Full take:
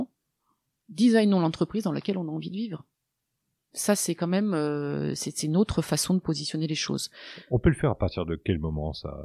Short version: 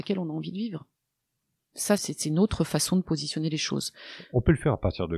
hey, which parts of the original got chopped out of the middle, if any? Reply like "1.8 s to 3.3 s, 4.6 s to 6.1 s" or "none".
4.0 s to 5.2 s

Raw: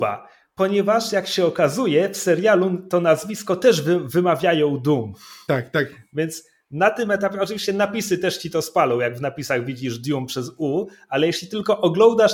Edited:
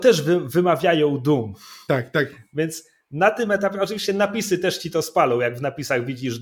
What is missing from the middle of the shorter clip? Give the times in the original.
none

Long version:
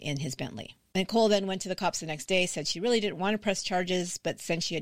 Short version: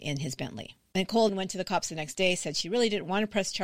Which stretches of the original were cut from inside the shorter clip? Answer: 1.3 s to 1.4 s

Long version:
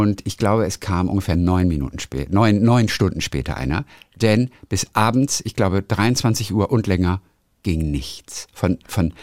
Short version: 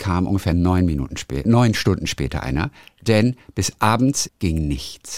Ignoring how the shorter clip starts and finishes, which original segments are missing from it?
2.3 s to 2.6 s, 5.4 s to 7.5 s

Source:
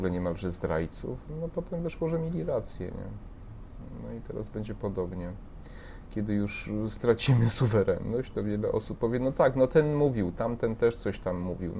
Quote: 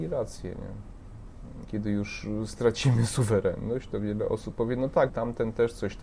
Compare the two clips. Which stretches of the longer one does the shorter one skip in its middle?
4.0 s to 6.1 s, 9.5 s to 10.3 s

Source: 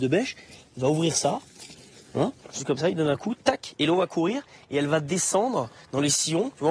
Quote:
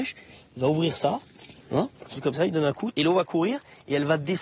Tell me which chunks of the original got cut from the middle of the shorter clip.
1.8 s to 2.0 s, 3.4 s to 3.7 s

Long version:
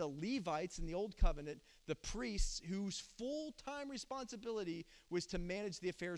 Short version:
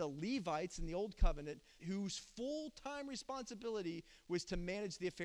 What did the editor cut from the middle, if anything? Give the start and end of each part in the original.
1.8 s to 2.6 s

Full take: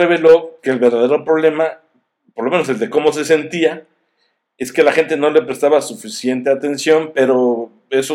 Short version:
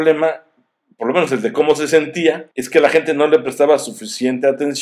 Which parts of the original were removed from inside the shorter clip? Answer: 3.9 s to 4.5 s

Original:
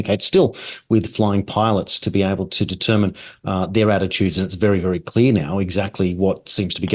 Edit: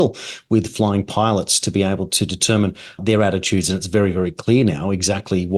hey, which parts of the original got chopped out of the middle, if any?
3.4 s to 3.7 s

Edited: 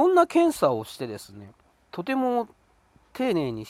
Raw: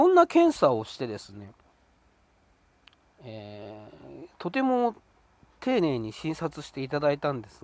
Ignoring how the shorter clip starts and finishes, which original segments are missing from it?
1.9 s to 4.4 s

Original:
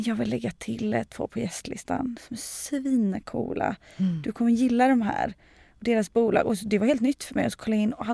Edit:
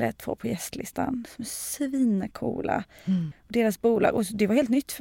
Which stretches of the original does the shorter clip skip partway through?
4.2 s to 5.6 s

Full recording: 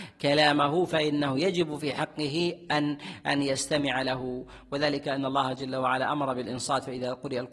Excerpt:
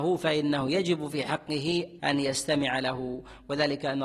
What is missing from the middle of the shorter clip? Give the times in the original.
2.7 s to 3.2 s

